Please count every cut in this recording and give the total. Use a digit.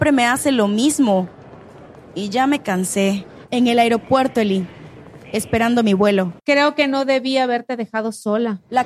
2